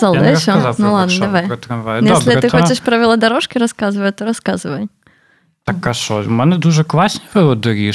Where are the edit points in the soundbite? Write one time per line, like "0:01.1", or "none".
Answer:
none